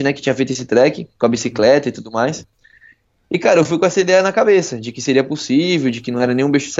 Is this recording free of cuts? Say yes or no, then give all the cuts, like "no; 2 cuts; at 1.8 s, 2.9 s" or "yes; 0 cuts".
yes; 0 cuts